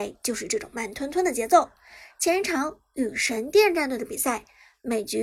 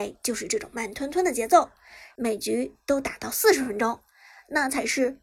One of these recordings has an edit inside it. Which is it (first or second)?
second